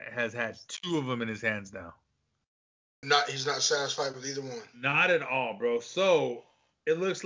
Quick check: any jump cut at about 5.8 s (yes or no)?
no